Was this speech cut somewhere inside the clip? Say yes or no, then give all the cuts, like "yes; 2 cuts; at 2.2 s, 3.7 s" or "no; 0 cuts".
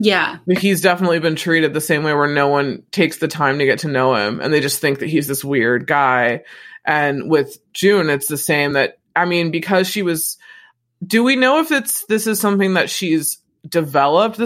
no; 0 cuts